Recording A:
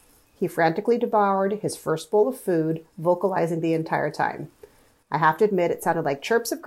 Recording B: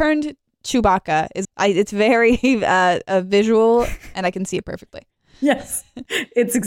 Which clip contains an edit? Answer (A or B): B